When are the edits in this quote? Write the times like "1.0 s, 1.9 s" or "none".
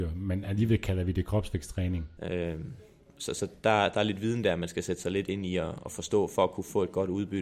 2.2 s